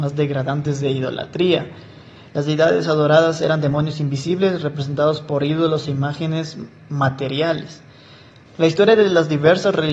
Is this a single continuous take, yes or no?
no